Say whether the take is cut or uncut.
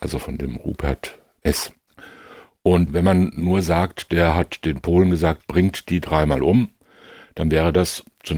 uncut